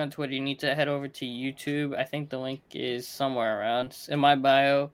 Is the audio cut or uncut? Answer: uncut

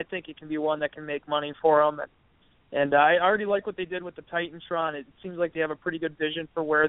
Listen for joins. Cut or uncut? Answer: uncut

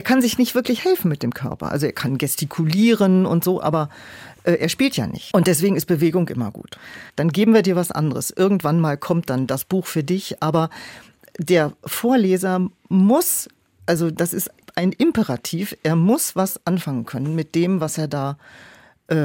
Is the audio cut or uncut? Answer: cut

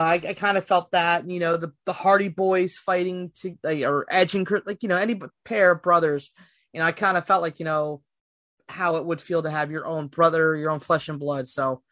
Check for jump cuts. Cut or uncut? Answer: uncut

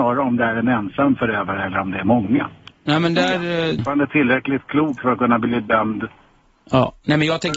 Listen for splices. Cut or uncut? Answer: cut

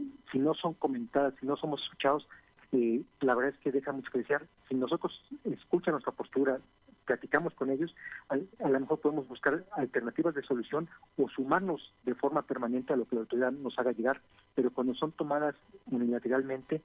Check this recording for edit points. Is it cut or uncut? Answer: uncut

